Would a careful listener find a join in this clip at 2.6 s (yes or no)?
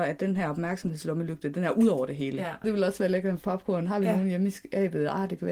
yes